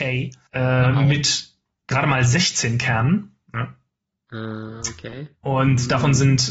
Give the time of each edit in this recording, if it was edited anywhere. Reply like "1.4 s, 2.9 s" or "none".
none